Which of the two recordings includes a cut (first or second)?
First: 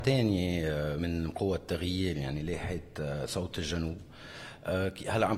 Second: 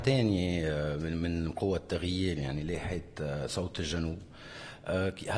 first